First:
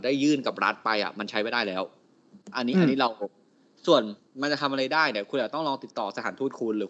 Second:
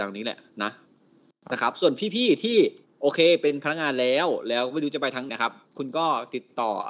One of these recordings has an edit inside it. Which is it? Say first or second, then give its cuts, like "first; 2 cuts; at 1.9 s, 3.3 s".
second; 1 cut; at 5.3 s